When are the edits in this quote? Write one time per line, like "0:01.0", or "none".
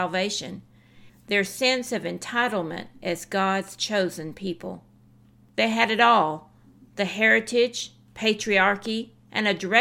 0:01.1